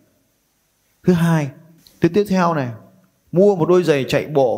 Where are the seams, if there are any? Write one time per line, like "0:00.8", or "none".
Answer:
none